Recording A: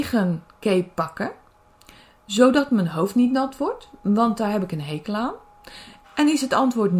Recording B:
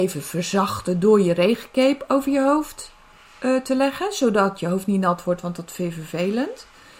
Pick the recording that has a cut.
A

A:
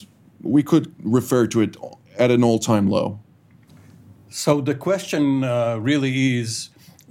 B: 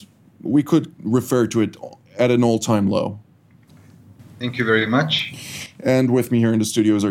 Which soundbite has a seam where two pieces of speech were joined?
B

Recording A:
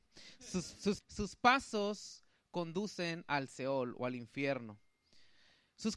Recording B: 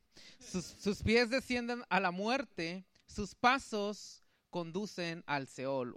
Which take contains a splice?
A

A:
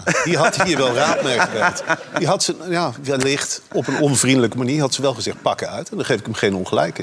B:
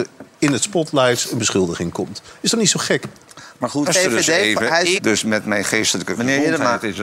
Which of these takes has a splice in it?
B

